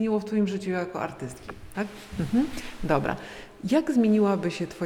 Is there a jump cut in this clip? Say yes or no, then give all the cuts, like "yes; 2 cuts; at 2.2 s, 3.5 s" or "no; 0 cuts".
yes; 1 cut; at 1.7 s